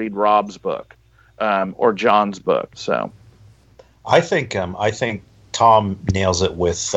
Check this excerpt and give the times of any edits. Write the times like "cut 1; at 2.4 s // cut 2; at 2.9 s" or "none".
cut 1; at 2.7 s